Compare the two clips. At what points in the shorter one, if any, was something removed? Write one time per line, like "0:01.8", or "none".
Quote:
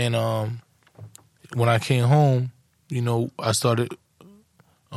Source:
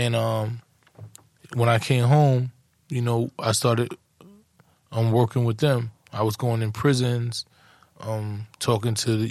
none